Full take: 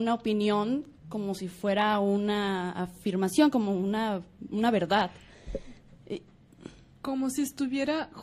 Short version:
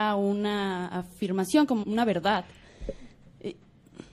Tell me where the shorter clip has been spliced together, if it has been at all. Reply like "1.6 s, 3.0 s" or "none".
1.8 s